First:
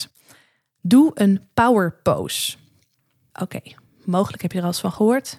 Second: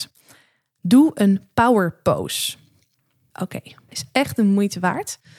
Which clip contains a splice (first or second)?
second